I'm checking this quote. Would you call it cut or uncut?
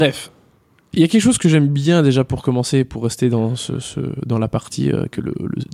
uncut